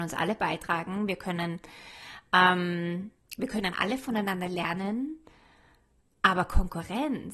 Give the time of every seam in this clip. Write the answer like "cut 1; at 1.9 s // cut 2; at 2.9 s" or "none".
none